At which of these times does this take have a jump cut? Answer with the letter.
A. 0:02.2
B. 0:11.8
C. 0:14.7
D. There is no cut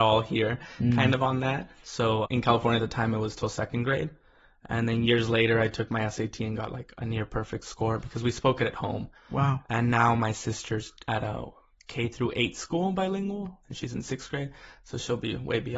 A